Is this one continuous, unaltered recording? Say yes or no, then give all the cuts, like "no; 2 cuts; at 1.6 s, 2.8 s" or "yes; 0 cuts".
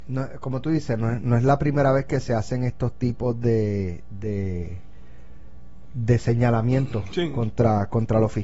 yes; 0 cuts